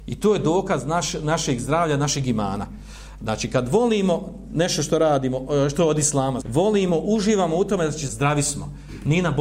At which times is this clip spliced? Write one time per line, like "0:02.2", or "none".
0:06.4
0:08.1